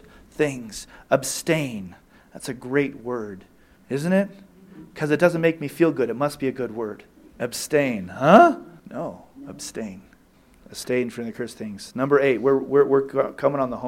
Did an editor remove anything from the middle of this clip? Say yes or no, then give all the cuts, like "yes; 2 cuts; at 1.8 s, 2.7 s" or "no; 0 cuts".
yes; 1 cut; at 8.8 s